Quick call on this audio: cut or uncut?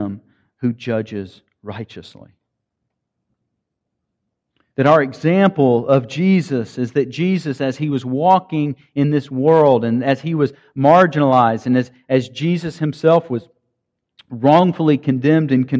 uncut